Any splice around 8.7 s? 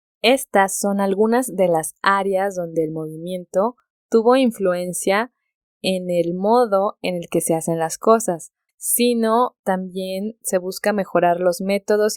yes; 1 cut; at 8.7 s

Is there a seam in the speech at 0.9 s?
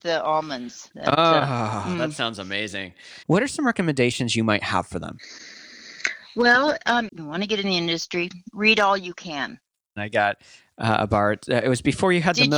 no; 3 cuts; at 3.2 s, 7.1 s, 10.0 s

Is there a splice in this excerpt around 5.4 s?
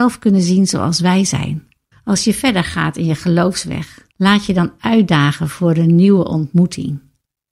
no; 2 cuts; at 1.9 s, 4.1 s

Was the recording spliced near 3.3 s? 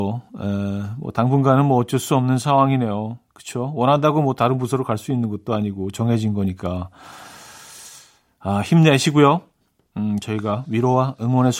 no; 0 cuts

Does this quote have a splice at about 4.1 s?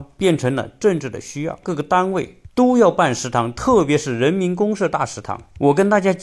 no; 1 cut; at 1.6 s

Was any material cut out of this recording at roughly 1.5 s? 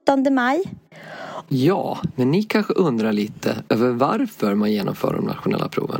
yes; 1 cut; at 1.5 s

